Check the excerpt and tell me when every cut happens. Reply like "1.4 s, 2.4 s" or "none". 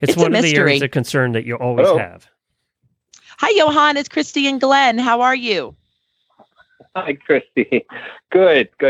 none